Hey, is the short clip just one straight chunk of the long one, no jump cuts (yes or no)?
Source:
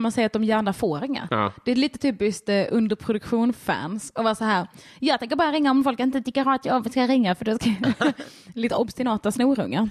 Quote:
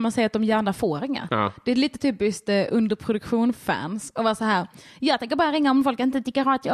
yes